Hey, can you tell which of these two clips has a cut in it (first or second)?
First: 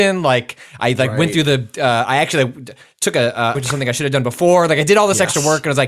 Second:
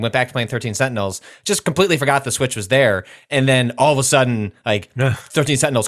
first